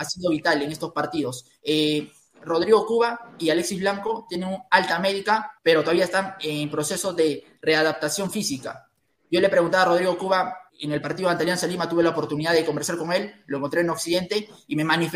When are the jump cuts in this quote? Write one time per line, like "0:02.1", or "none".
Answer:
0:05.6
0:10.7